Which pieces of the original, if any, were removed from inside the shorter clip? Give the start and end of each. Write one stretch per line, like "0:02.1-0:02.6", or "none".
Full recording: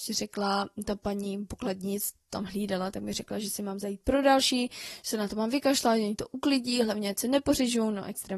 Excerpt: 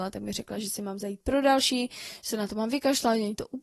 none